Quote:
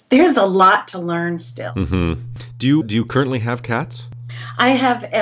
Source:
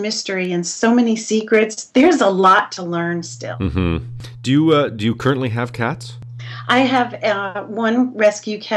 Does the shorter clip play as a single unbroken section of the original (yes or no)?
no